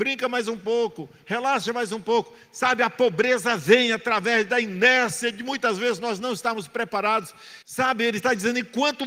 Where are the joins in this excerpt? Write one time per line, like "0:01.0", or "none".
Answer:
0:07.6